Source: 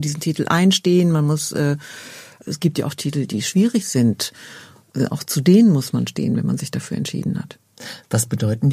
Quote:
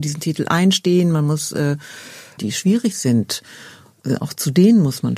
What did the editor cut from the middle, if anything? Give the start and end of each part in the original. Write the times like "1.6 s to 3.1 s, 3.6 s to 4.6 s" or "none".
2.4 s to 3.3 s